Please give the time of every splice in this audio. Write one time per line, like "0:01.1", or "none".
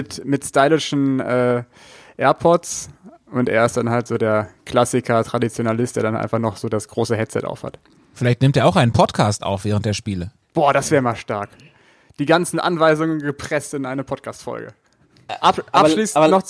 none